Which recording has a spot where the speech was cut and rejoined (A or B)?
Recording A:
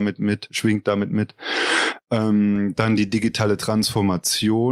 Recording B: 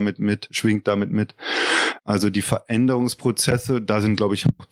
B